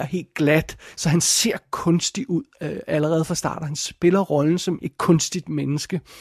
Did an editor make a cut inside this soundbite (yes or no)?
yes